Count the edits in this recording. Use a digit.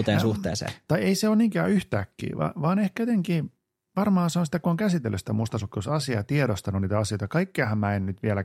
0